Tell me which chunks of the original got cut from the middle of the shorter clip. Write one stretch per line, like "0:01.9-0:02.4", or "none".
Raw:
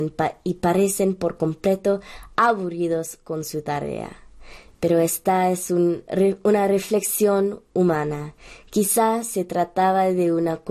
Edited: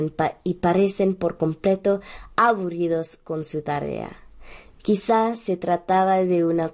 0:04.8-0:08.6